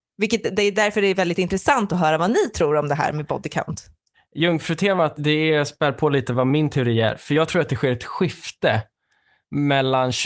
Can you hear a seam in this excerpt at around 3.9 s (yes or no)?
no